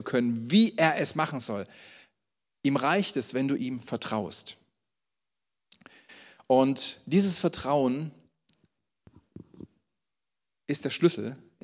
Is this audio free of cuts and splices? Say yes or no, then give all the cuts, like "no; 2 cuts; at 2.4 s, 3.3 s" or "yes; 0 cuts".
yes; 0 cuts